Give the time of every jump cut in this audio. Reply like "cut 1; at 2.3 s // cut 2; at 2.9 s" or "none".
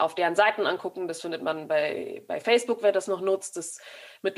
none